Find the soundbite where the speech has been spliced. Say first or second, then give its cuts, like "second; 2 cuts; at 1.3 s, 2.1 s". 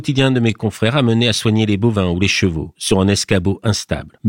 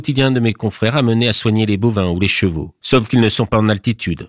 first; 1 cut; at 2.7 s